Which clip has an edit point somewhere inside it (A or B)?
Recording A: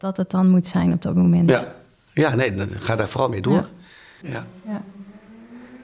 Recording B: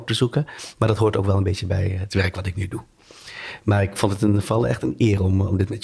A